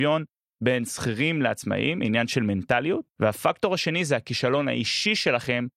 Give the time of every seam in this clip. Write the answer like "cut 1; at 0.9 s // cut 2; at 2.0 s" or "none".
cut 1; at 3.1 s